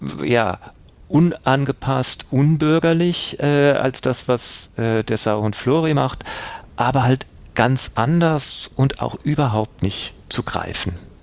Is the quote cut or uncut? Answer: uncut